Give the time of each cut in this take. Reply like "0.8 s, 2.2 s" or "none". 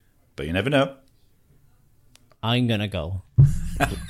none